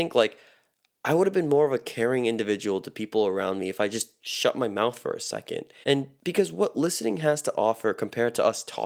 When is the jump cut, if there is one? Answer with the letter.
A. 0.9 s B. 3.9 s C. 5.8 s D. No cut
C